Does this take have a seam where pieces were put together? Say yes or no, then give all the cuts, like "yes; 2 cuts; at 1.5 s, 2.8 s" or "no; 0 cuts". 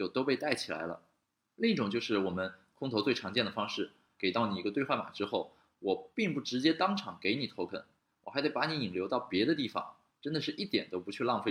yes; 2 cuts; at 1.5 s, 4.2 s